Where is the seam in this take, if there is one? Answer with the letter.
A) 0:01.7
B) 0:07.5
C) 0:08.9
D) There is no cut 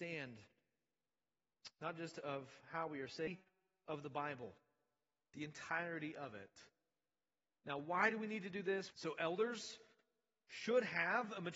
C